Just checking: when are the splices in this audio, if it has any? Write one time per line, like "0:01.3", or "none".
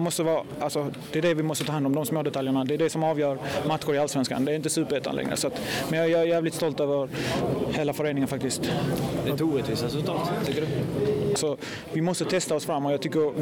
0:11.4